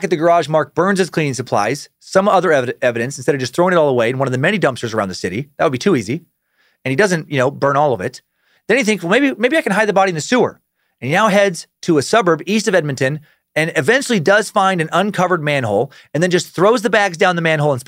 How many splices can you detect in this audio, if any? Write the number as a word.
one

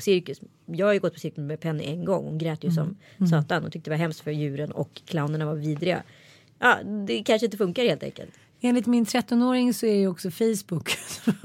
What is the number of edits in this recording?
zero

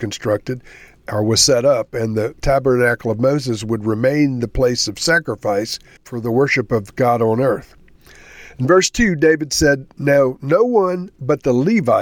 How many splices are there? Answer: one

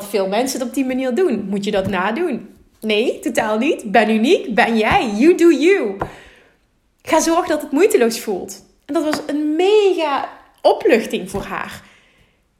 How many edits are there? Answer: zero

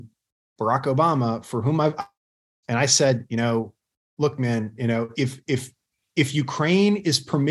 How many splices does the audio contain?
two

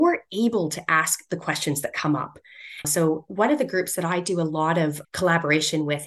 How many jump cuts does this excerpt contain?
one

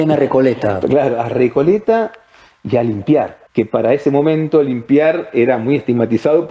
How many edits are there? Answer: one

